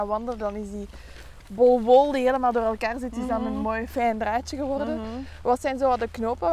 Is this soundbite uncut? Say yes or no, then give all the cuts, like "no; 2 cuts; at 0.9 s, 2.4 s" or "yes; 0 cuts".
yes; 0 cuts